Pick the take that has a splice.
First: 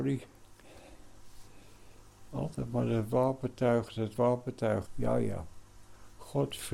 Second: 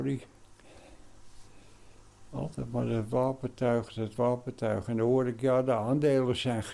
first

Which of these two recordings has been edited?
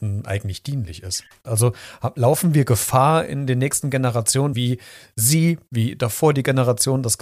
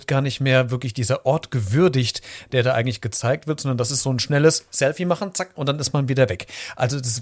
first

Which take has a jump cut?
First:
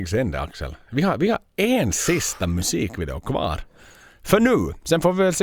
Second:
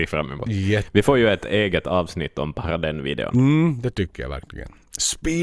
first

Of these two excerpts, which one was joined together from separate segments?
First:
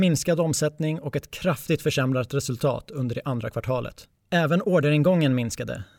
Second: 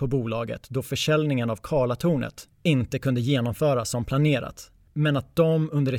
first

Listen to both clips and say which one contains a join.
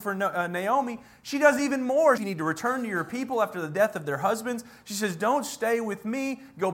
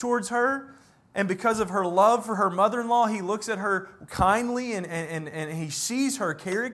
first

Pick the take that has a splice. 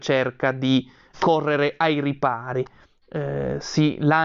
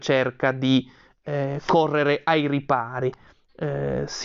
first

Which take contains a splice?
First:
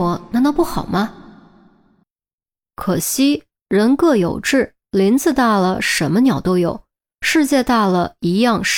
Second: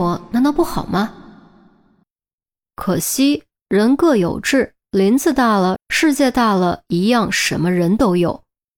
second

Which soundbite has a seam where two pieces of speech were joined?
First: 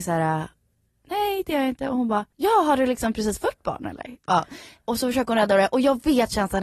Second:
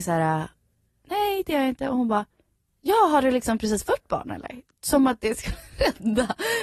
first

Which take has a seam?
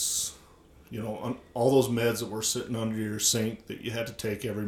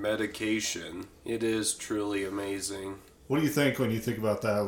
second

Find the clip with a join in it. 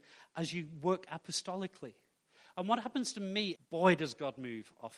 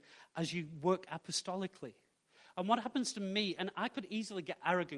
first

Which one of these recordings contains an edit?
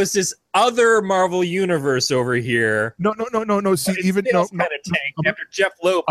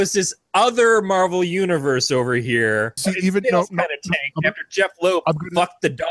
second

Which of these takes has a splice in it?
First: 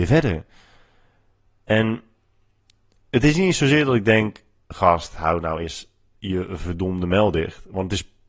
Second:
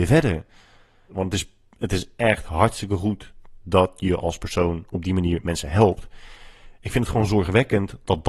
second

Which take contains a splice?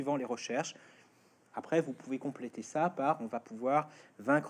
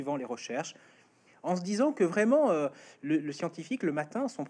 second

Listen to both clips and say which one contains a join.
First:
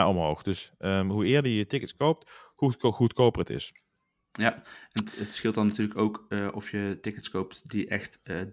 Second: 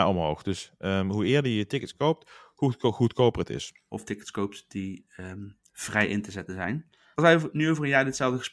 second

